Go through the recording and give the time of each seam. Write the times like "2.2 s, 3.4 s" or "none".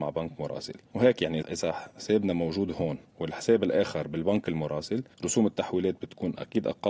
1.4 s